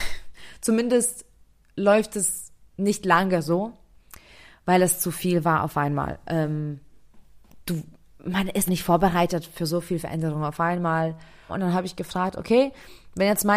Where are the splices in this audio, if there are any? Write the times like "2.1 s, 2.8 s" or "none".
8.7 s, 11.5 s